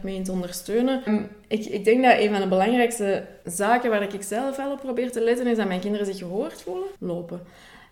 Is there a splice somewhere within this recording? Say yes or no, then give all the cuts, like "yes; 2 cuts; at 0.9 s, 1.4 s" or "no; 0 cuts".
yes; 3 cuts; at 1.1 s, 3.4 s, 7.0 s